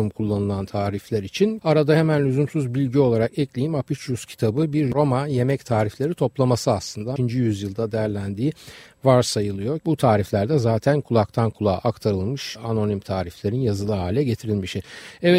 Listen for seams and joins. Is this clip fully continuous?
no; 3 cuts; at 1.6 s, 7.2 s, 9.8 s

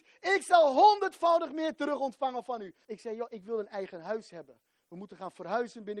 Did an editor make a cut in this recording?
yes; 1 cut; at 2.8 s

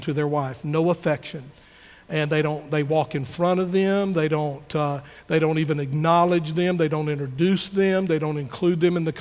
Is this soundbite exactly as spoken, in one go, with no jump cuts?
yes; 0 cuts

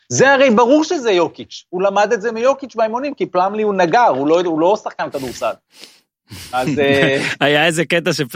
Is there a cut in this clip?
no; 0 cuts

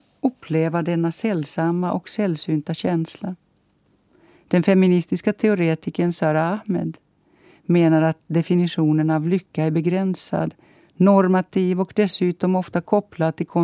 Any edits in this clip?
yes; 1 cut; at 4.4 s

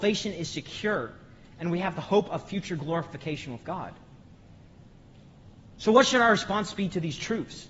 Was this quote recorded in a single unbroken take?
yes; 0 cuts

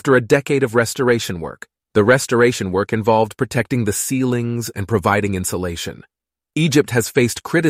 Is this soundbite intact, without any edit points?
no; 2 cuts; at 1.8 s, 4.7 s

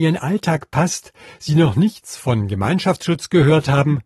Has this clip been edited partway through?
no; 0 cuts

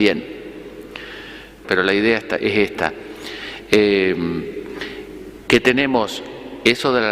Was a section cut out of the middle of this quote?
yes; 1 cut; at 1.6 s

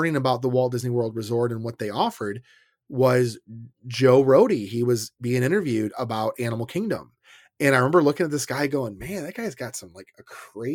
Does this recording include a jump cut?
no; 0 cuts

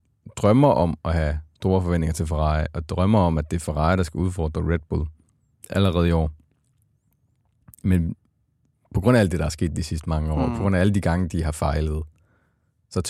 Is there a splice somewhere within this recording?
no; 0 cuts

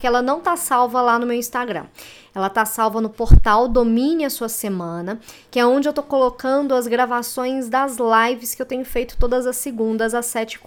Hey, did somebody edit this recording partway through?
no; 0 cuts

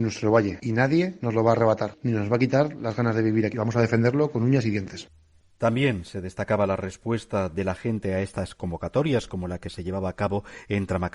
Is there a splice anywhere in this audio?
no; 0 cuts

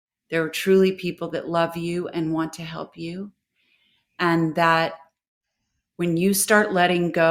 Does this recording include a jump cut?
no; 0 cuts

